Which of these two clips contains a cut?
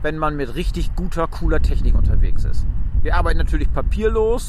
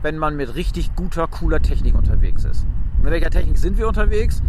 first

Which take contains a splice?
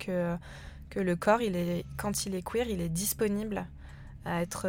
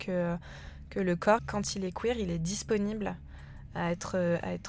second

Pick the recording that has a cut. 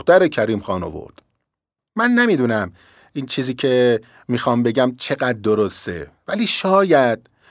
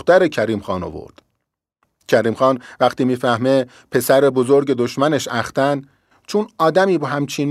first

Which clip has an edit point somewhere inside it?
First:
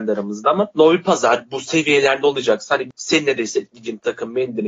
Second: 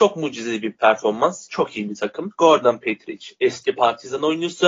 second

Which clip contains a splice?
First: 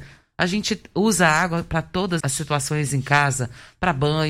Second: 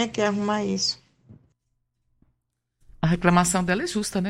first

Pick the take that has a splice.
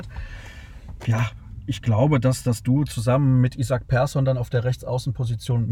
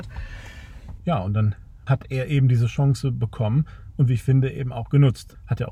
second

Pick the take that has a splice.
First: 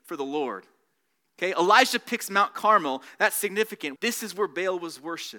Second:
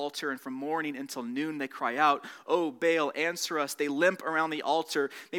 first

